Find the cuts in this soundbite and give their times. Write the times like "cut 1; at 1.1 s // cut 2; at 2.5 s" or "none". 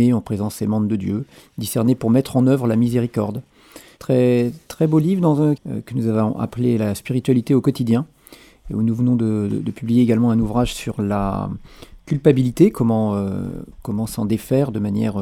cut 1; at 4.0 s // cut 2; at 5.6 s